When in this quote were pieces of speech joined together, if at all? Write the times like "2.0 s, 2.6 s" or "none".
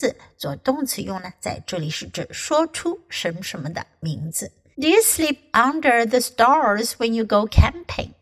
4.7 s